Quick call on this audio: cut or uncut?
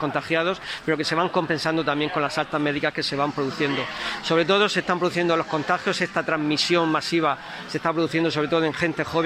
uncut